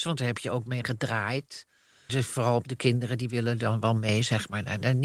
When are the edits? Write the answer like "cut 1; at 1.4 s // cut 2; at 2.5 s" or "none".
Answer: cut 1; at 2.1 s